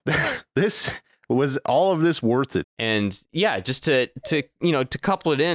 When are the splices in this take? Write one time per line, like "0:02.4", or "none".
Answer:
0:02.6